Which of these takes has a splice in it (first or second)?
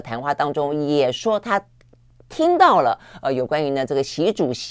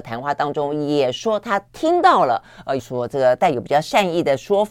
second